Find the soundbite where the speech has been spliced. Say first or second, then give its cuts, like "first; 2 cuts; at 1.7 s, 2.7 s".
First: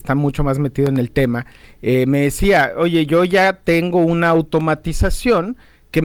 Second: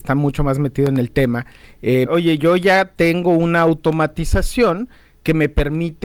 second; 1 cut; at 2.1 s